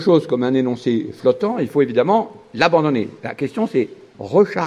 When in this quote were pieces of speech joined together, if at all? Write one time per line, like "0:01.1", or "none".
none